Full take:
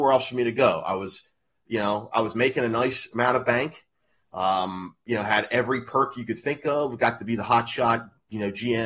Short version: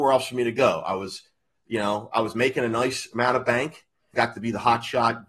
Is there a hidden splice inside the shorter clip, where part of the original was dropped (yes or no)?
yes